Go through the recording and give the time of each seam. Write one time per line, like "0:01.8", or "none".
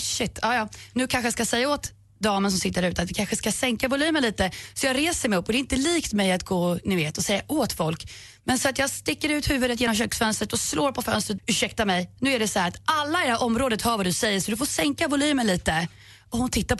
0:11.4